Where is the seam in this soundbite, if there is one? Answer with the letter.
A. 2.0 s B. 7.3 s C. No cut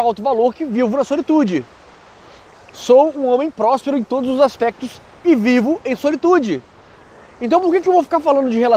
C